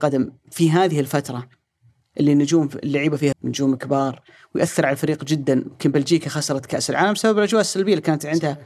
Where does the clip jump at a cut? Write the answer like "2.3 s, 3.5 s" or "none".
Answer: 3.3 s